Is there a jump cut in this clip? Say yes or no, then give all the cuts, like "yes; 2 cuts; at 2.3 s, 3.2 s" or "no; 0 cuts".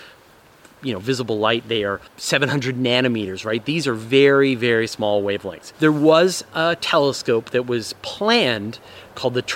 yes; 2 cuts; at 2.1 s, 5.7 s